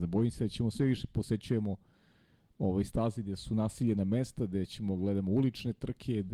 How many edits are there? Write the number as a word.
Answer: zero